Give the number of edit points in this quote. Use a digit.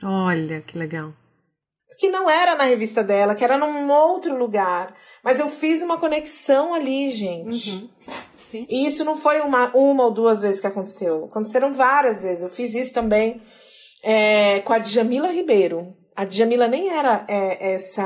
0